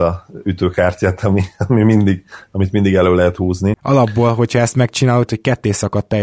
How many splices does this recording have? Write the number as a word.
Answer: two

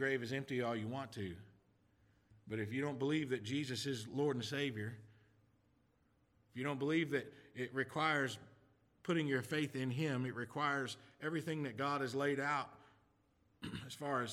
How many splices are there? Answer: zero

